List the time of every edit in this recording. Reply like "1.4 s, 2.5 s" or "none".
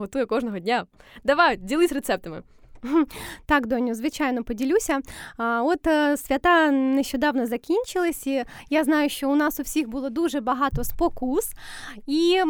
none